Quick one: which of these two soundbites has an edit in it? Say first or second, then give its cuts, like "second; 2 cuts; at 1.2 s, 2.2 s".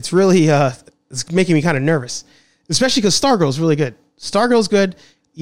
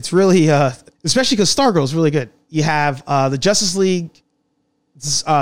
second; 2 cuts; at 0.9 s, 2.5 s